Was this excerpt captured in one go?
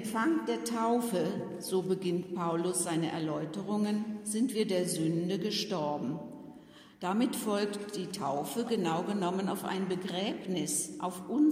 yes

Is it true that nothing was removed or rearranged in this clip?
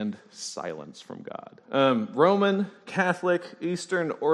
no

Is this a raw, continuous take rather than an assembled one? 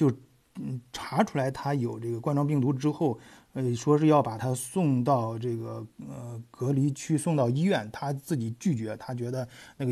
yes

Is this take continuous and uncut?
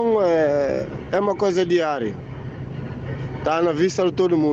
yes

